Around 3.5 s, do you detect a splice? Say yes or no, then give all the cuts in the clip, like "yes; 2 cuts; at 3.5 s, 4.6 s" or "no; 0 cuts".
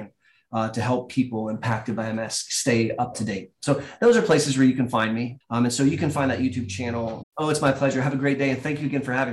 no; 2 cuts; at 5.4 s, 7.2 s